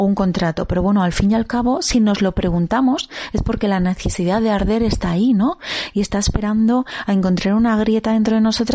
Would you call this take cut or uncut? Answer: uncut